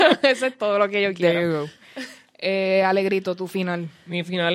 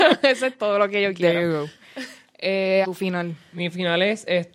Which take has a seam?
second; 1 cut; at 2.8 s

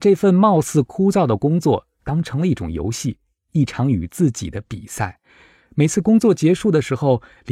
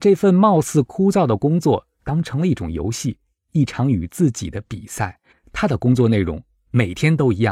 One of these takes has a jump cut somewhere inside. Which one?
second; 1 cut; at 5.3 s

